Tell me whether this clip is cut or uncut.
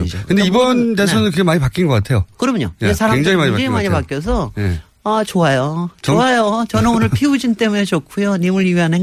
uncut